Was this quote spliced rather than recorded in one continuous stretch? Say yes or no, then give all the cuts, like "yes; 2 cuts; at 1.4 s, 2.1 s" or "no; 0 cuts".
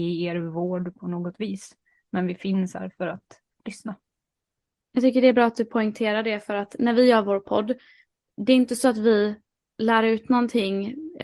no; 0 cuts